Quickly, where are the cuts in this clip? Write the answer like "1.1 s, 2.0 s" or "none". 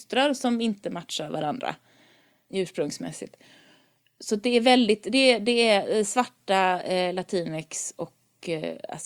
none